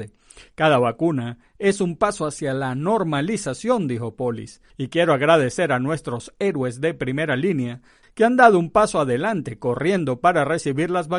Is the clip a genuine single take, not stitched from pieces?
no; 2 cuts; at 4.7 s, 8.0 s

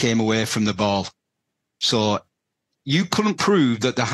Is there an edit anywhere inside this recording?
no; 0 cuts

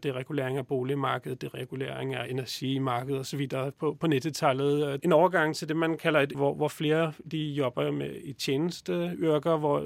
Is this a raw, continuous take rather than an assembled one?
no; 2 cuts; at 5.0 s, 6.3 s

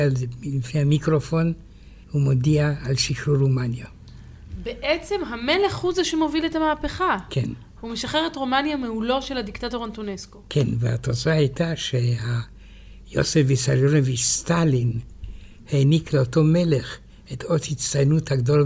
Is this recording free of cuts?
no; 1 cut; at 2.0 s

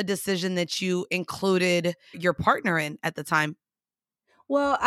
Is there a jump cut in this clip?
yes; 1 cut; at 2.1 s

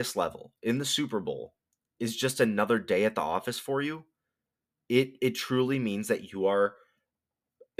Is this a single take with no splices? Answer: yes; 0 cuts

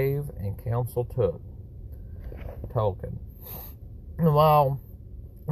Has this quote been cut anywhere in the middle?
yes; 1 cut; at 2.7 s

